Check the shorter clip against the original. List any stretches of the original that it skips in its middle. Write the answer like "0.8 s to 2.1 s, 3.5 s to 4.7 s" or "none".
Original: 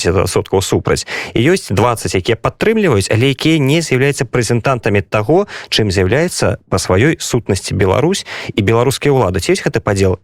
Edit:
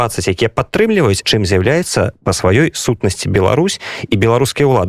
3.1 s to 5.7 s